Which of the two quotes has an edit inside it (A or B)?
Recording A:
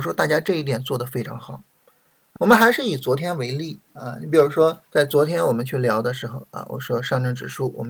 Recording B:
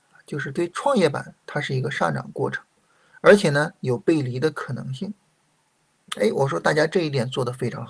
A